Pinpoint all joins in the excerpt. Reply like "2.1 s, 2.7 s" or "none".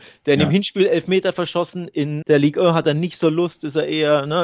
2.2 s